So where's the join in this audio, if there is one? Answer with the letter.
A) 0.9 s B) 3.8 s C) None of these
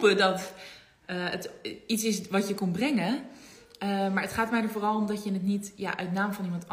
C